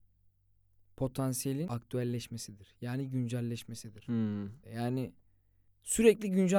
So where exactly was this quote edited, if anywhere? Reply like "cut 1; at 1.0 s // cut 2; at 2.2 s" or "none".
cut 1; at 4.6 s